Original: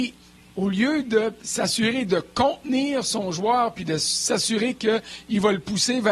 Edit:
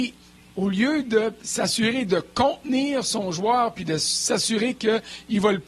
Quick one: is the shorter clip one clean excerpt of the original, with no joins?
yes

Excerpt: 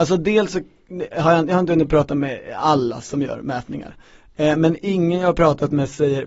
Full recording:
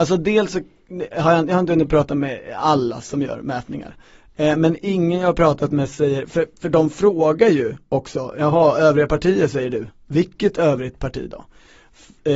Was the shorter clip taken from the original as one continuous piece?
yes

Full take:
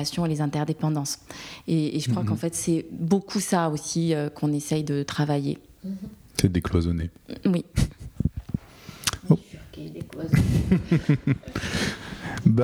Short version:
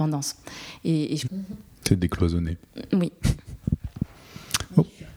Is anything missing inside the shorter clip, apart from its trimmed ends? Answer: yes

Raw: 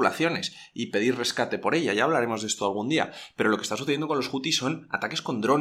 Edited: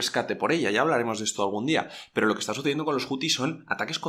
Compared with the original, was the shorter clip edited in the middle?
no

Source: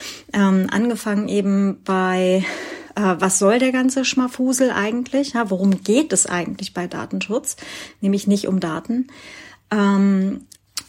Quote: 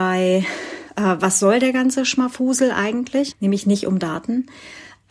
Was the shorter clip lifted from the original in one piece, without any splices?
no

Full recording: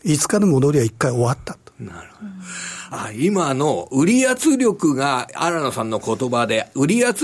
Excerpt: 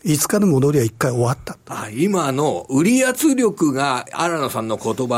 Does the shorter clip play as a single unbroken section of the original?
no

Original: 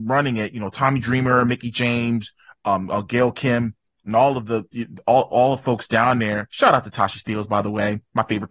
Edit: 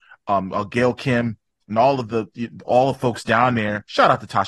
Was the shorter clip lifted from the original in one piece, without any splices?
no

